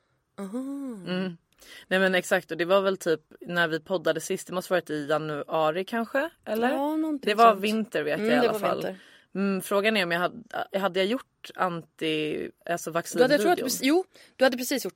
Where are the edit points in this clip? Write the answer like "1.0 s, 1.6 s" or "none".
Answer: none